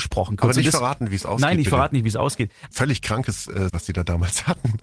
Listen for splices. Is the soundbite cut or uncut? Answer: cut